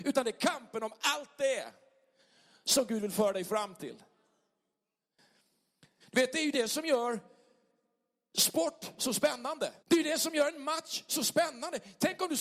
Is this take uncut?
no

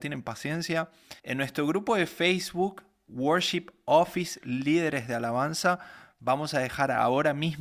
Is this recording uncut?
no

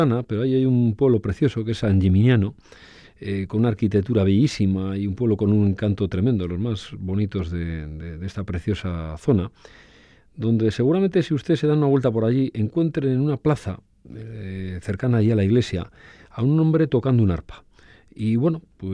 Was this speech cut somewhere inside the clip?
no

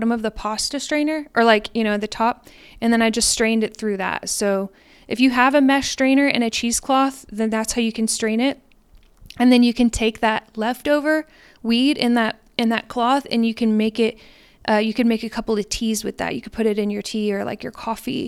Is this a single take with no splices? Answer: yes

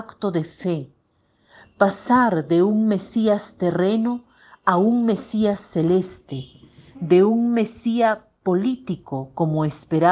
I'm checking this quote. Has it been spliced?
no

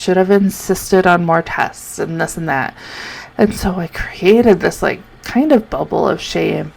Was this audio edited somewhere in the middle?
no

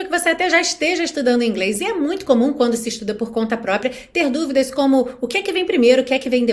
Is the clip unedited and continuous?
yes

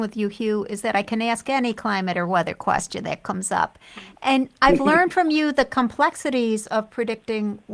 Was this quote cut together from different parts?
no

